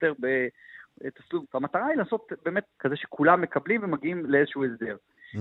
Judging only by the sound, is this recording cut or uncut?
cut